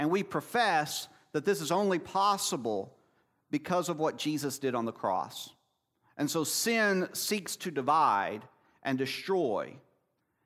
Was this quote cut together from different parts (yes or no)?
no